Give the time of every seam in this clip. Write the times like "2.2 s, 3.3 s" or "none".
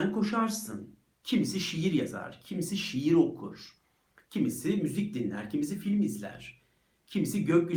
none